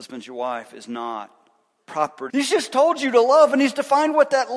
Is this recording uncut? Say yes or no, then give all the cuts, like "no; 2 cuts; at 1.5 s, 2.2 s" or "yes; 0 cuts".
no; 1 cut; at 2.3 s